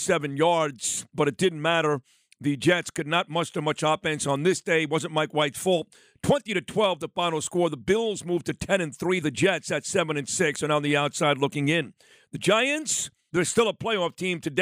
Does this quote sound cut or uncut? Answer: cut